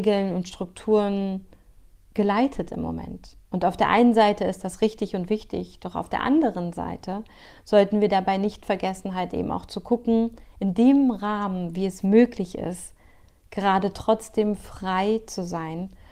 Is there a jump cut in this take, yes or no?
no